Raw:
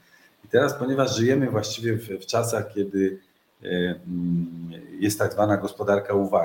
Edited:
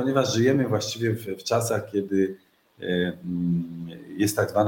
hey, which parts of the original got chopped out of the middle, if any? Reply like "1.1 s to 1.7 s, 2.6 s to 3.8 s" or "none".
none